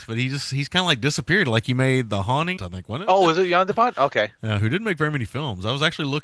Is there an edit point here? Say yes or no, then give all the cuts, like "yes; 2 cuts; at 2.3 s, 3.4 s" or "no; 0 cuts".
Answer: yes; 1 cut; at 2.6 s